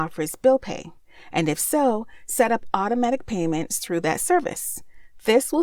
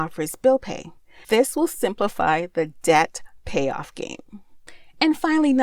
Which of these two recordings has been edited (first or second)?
second